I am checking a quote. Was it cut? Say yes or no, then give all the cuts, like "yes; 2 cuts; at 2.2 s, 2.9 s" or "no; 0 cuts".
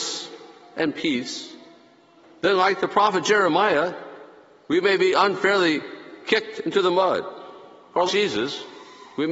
yes; 1 cut; at 8.1 s